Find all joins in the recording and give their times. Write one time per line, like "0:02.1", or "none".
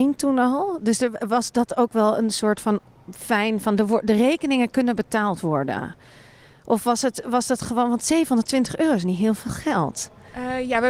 none